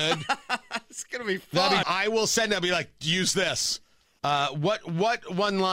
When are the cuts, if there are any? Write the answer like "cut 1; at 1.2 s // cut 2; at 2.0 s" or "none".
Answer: cut 1; at 1.8 s // cut 2; at 4.2 s